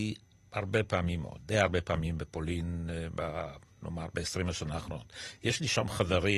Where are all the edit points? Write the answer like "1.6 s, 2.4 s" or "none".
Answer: none